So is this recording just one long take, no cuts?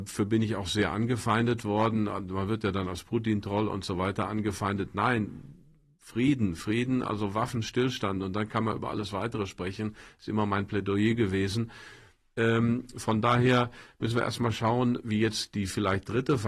yes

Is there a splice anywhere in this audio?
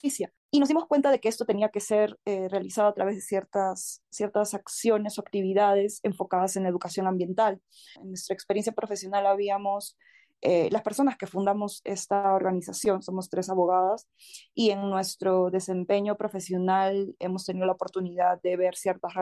yes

